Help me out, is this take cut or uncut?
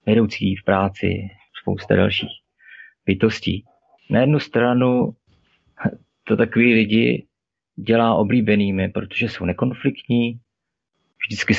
cut